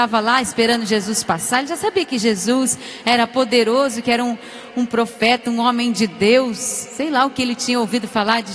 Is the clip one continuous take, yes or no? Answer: yes